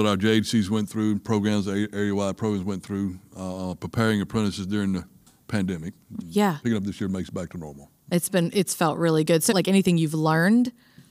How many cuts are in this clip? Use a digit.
2